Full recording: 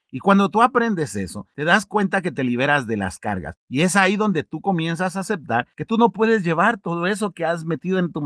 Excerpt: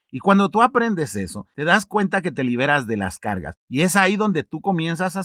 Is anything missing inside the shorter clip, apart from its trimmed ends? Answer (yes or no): no